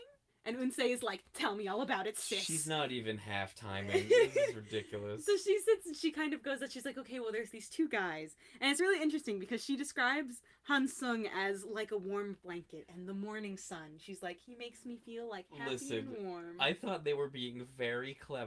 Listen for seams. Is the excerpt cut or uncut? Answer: uncut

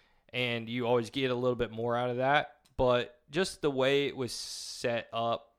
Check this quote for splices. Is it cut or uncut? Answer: uncut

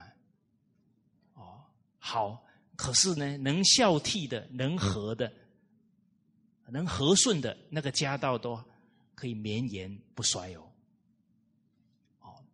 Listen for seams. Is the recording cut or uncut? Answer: uncut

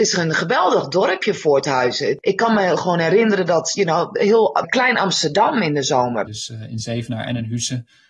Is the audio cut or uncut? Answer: cut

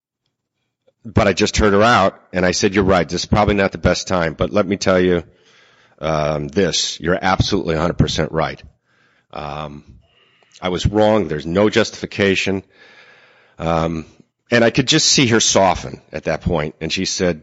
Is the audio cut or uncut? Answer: uncut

